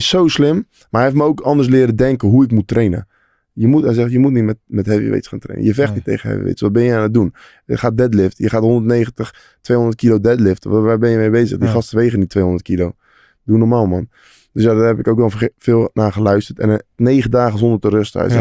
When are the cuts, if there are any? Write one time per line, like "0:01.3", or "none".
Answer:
0:17.0

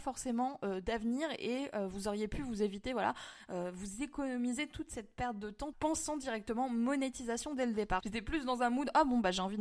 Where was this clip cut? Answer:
0:05.7
0:08.0

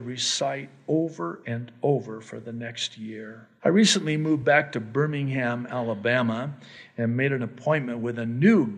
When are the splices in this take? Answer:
0:03.6

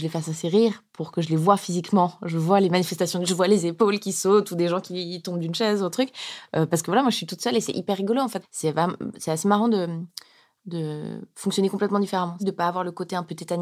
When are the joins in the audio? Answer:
0:08.4
0:12.4

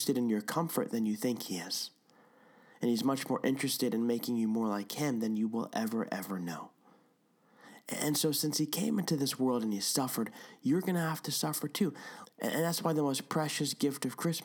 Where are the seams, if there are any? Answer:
0:12.3

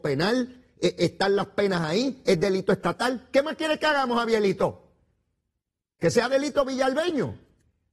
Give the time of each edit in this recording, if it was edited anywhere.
0:02.2

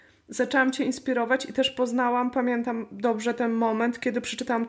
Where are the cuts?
none

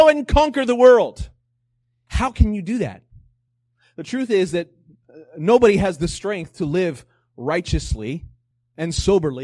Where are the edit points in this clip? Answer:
0:02.1

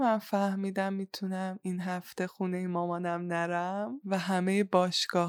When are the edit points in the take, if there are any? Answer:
none

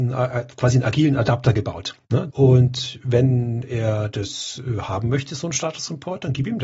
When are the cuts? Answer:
0:02.3

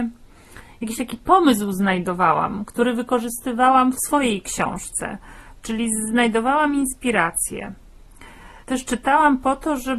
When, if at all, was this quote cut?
0:08.6

